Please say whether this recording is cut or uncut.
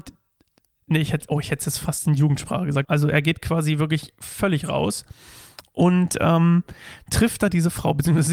cut